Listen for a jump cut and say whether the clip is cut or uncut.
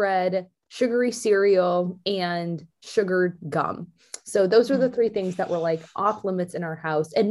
uncut